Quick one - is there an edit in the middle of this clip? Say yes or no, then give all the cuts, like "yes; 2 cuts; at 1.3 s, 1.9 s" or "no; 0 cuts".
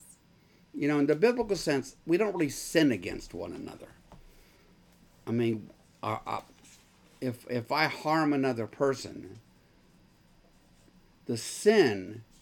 no; 0 cuts